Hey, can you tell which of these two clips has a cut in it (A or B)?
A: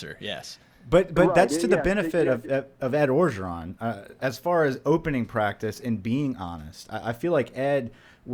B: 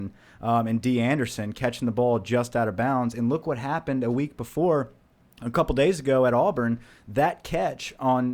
A